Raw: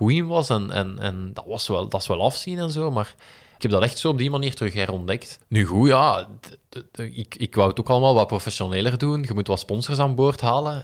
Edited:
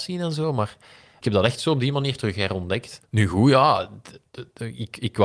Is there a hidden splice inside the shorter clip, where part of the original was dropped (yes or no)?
no